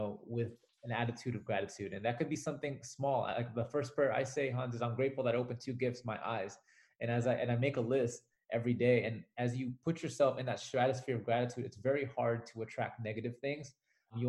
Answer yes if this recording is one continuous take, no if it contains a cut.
yes